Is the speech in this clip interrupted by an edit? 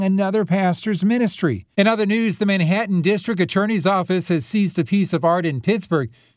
yes; 1 cut; at 1.7 s

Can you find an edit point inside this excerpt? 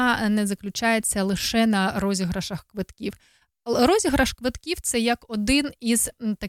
no; 0 cuts

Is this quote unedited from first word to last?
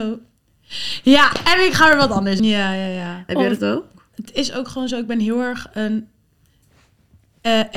no; 2 cuts; at 2.4 s, 4.1 s

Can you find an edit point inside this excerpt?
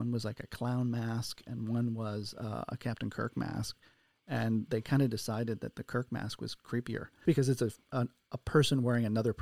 yes; 1 cut; at 7.3 s

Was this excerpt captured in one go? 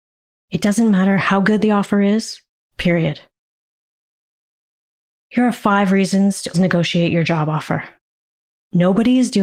no; 2 cuts; at 2.7 s, 6.5 s

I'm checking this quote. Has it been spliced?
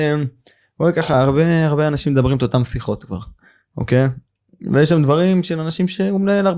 no; 0 cuts

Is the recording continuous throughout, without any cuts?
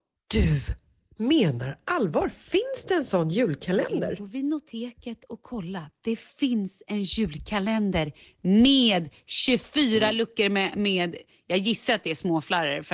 yes; 0 cuts

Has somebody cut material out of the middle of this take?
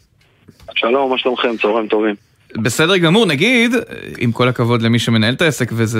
yes; 1 cut; at 4.1 s

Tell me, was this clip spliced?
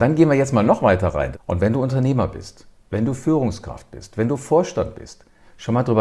yes; 1 cut; at 1.3 s

